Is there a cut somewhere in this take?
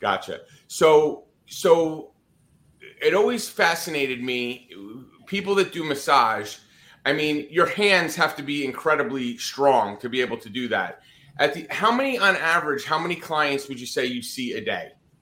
no; 0 cuts

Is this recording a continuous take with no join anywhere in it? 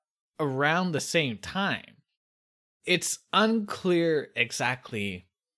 yes; 0 cuts

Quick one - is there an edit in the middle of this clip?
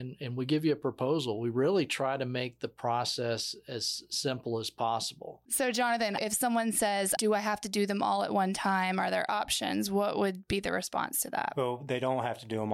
yes; 1 cut; at 7.2 s

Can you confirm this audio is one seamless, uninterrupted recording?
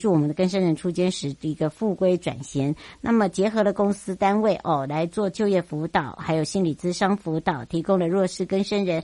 yes; 0 cuts

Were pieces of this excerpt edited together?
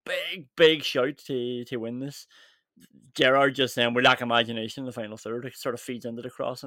no; 0 cuts

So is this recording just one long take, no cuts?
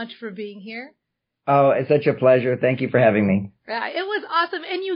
yes; 0 cuts

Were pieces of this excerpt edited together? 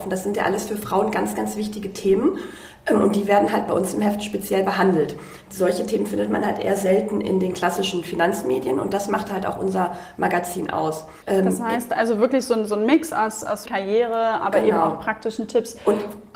yes; 2 cuts; at 11.2 s, 13.7 s

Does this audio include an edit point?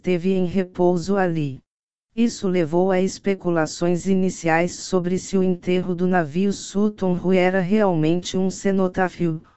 yes; 1 cut; at 1.9 s

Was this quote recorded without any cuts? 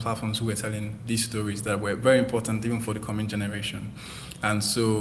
yes; 0 cuts

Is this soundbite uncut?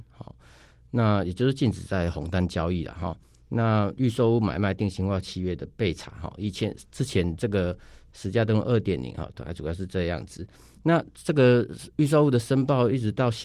yes; 0 cuts

